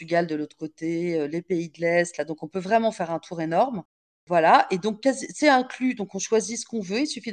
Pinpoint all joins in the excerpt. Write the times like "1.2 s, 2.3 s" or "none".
none